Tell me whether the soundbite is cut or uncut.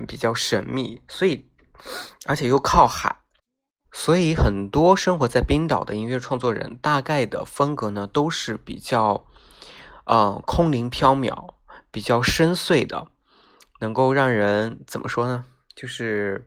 uncut